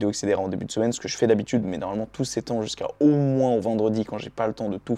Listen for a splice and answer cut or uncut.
uncut